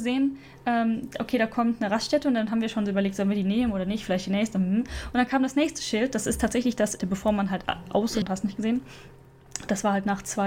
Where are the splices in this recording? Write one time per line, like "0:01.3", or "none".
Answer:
0:07.0
0:08.2